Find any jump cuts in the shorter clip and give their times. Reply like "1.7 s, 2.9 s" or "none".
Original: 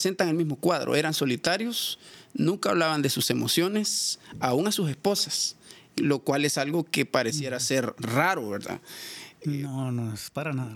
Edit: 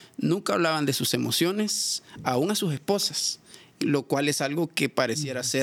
none